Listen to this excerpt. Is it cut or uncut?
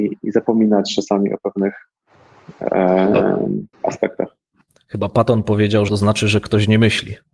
cut